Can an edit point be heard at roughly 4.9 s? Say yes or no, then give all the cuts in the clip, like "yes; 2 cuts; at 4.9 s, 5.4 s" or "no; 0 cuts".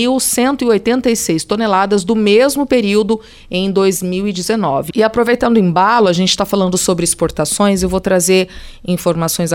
yes; 1 cut; at 4.9 s